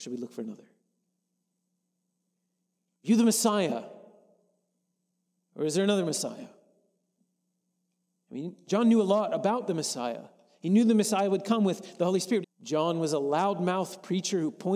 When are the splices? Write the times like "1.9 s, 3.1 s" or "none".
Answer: 12.4 s